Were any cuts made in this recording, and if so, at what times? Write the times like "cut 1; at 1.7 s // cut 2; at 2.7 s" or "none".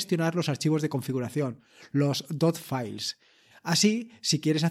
cut 1; at 3.5 s